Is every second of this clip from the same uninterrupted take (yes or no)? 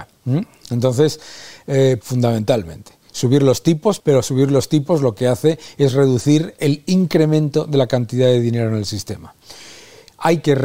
no